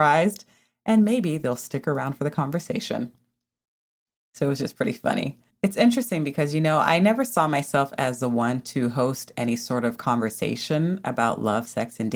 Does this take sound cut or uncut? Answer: uncut